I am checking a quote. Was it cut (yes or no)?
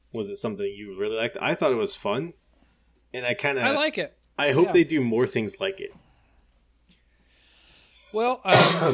no